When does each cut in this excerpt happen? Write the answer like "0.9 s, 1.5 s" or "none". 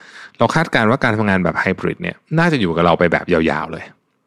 2.3 s